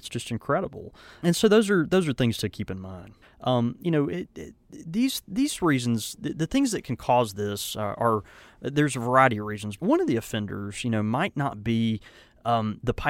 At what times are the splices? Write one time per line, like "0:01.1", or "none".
0:03.2
0:09.8